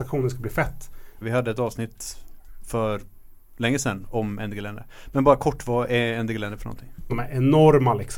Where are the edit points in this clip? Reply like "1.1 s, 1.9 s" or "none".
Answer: 1.2 s, 7.1 s